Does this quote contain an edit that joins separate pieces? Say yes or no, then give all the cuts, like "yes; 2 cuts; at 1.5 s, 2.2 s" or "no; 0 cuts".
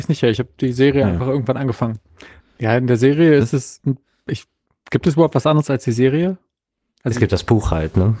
yes; 1 cut; at 2.4 s